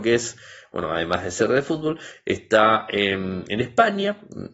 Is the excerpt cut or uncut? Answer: uncut